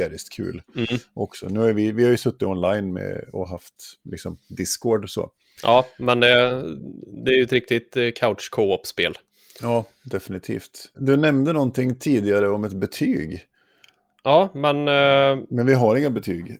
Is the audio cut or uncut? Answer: uncut